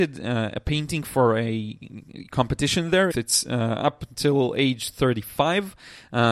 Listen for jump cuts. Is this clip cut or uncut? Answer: cut